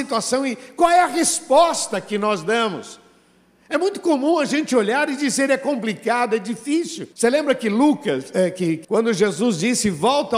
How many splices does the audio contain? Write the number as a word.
two